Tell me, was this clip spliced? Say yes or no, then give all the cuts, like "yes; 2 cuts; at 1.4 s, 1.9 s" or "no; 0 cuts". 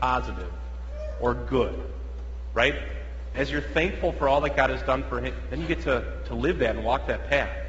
yes; 2 cuts; at 3.3 s, 5.5 s